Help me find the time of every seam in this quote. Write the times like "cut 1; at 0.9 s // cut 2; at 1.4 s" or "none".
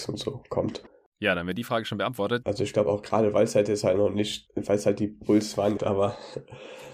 cut 1; at 2.4 s // cut 2; at 5.8 s